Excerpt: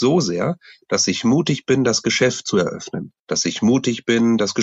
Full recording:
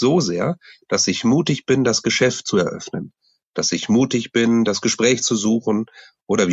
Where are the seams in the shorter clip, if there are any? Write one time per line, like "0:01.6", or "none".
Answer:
0:03.2